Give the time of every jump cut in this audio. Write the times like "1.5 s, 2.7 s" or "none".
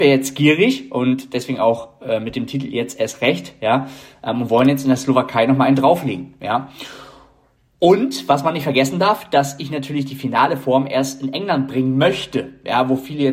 none